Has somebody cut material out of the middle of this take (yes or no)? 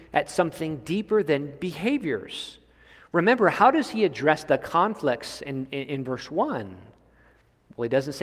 no